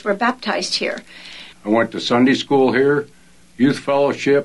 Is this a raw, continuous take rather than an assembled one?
no; 1 cut; at 1.5 s

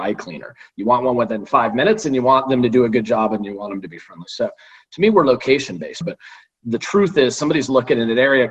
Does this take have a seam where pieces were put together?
yes; 1 cut; at 6.0 s

